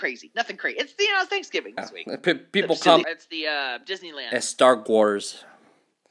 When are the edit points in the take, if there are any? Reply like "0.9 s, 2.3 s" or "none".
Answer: 1.8 s, 3.0 s